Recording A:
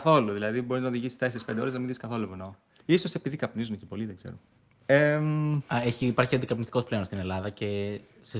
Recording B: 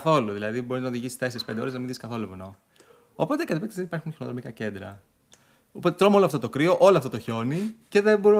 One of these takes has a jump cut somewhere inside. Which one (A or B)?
A